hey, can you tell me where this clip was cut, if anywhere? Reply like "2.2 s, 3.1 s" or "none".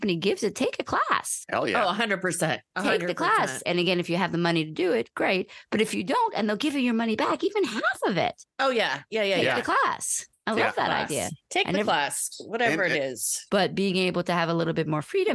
13.5 s